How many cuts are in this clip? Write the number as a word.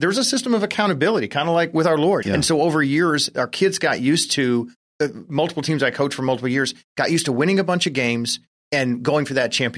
one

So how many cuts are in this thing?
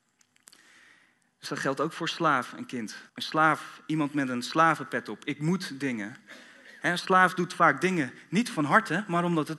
one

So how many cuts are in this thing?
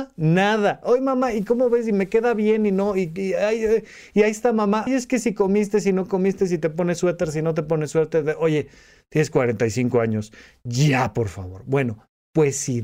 one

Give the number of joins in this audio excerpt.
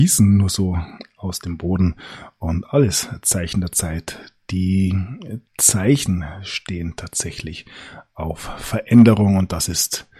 one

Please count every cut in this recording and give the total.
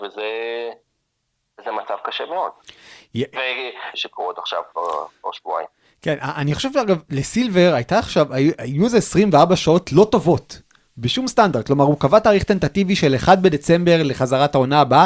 one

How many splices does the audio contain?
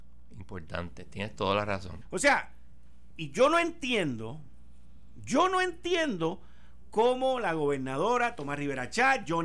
two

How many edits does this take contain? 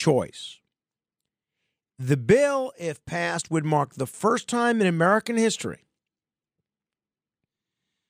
zero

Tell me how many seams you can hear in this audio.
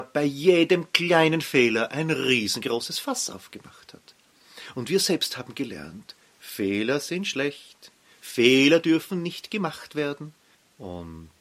zero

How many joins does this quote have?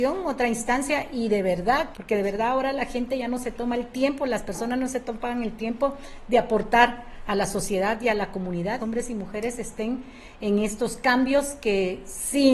two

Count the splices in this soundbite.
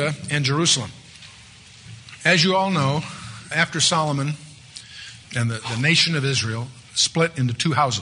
two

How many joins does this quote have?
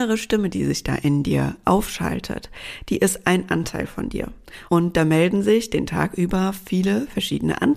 one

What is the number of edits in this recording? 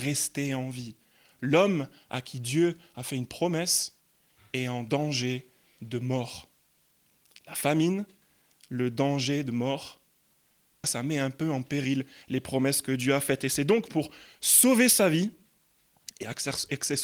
one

